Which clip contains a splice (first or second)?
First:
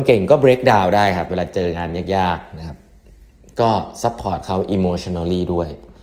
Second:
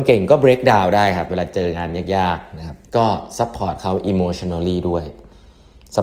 second